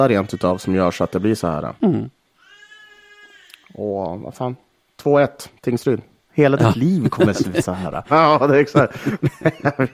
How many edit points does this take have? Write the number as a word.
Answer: three